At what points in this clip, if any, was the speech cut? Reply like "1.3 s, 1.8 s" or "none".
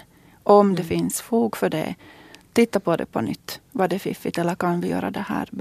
none